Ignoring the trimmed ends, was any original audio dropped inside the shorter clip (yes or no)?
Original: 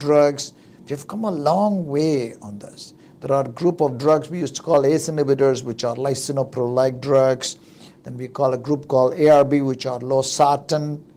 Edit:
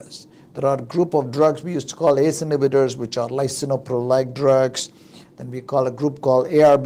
no